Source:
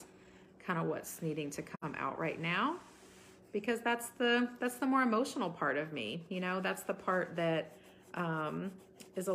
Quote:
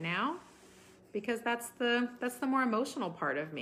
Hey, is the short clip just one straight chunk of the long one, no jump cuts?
yes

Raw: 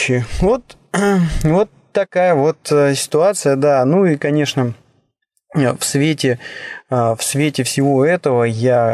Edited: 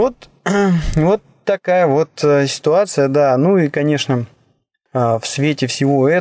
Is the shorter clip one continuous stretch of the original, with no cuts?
no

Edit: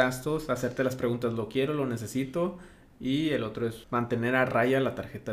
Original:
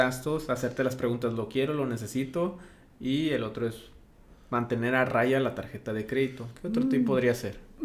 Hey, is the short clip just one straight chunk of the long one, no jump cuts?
no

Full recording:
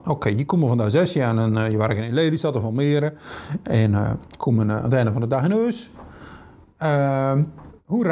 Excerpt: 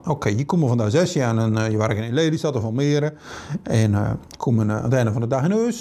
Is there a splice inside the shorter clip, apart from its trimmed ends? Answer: no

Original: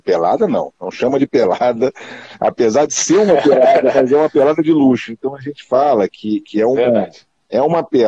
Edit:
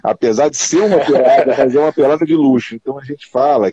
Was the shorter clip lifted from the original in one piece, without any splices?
yes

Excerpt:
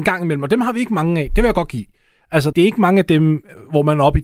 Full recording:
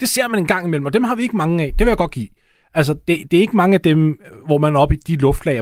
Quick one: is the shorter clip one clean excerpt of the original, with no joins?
no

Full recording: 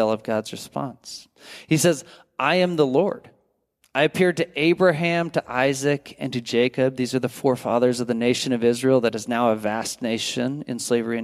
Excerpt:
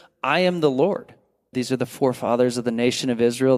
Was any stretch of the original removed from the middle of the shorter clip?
yes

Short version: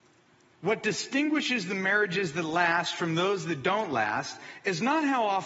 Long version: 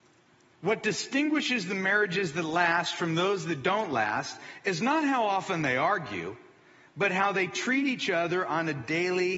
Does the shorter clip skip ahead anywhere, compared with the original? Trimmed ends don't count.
no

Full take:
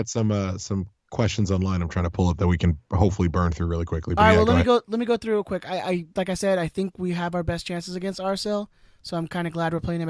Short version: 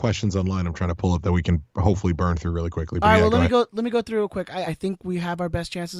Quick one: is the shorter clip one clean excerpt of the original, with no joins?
no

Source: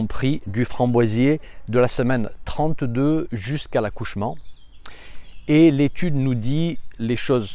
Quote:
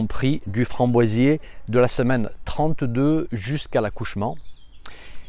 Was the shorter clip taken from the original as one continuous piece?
yes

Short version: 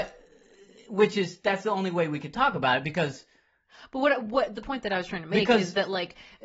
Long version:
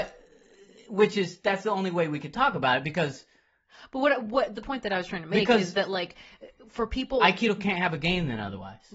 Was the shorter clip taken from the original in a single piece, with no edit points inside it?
yes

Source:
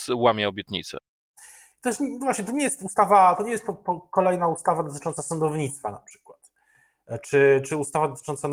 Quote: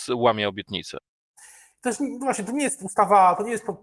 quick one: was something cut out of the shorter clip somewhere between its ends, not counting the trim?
no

